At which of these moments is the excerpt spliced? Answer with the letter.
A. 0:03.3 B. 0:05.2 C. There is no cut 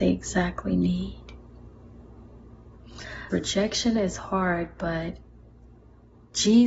A